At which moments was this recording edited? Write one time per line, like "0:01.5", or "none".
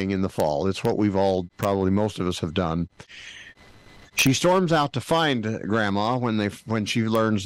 0:04.0